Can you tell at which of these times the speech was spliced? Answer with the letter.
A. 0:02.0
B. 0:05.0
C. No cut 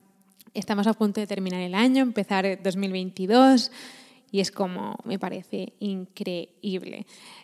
B